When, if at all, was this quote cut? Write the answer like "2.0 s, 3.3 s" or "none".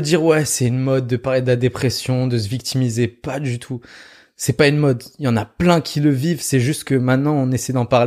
none